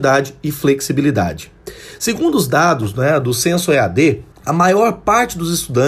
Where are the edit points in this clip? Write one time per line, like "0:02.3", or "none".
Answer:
0:04.3